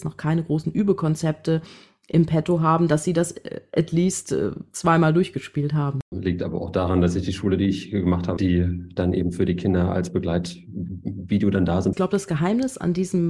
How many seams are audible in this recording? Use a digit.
3